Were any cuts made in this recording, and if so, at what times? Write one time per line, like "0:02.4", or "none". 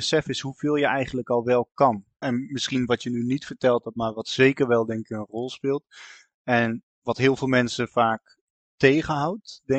0:02.2